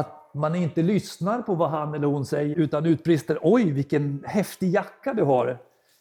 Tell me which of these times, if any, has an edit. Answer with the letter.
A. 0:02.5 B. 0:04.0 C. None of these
A